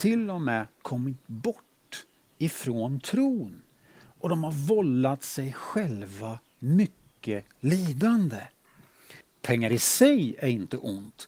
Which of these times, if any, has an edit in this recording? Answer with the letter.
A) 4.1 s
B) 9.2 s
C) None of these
B